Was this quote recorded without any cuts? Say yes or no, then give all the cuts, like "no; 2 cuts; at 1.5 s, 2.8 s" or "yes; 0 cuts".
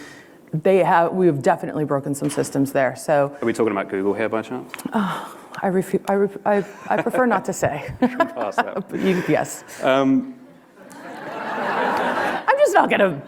yes; 0 cuts